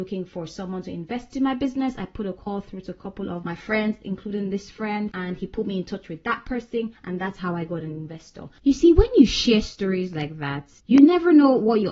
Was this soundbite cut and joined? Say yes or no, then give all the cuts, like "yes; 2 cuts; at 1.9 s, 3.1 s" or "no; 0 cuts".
yes; 1 cut; at 10.8 s